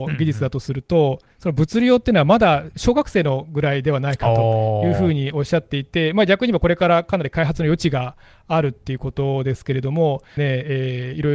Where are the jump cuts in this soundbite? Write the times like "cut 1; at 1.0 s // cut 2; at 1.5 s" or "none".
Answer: cut 1; at 10.4 s